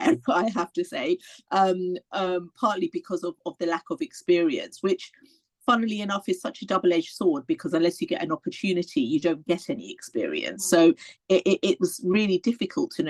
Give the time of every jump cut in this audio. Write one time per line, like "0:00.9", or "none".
none

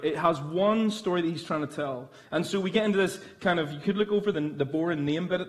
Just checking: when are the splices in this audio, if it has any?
none

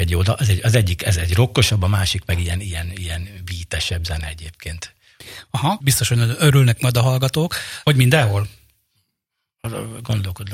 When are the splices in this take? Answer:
0:05.8
0:07.8

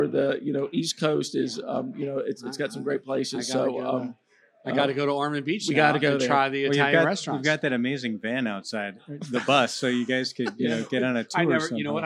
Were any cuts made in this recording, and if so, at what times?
none

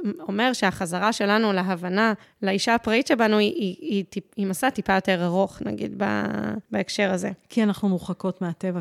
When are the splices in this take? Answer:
none

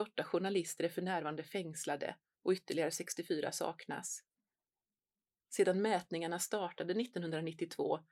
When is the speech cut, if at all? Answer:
none

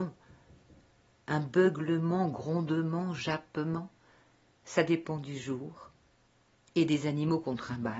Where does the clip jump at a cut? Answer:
none

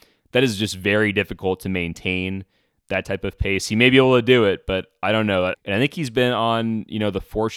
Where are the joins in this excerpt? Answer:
0:05.5

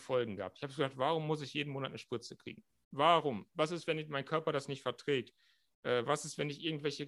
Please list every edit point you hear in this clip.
none

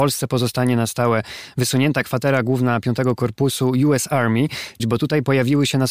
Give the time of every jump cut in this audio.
0:04.8

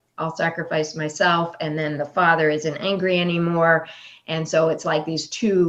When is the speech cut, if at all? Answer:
none

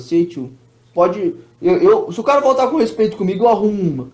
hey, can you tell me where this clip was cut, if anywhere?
none

